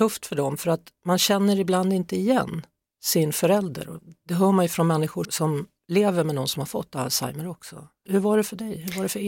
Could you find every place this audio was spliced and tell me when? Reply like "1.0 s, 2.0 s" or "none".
5.2 s